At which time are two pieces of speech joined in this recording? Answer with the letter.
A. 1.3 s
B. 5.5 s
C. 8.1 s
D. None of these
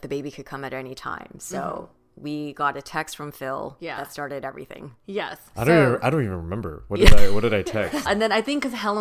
C